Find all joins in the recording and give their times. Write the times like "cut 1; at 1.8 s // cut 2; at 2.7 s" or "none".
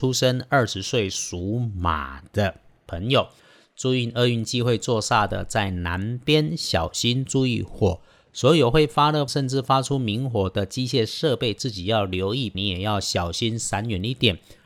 cut 1; at 9.3 s // cut 2; at 12.5 s